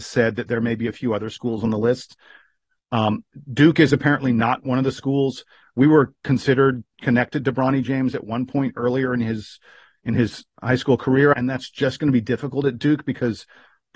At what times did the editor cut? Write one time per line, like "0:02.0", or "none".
0:11.3